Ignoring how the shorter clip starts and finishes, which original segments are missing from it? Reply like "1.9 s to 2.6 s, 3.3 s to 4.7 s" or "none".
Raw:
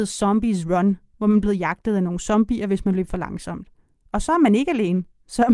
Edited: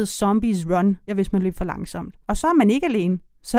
1.1 s to 2.6 s, 3.7 s to 4.1 s

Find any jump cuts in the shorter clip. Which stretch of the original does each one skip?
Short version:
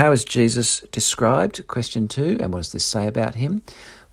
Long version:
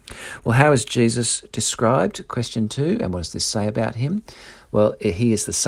none

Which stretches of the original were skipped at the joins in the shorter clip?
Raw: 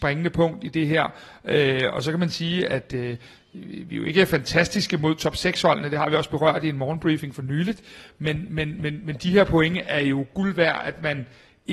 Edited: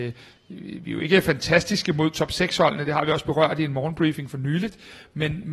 none

